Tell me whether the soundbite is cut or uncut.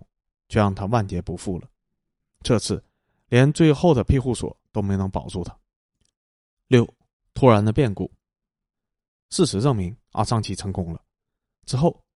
cut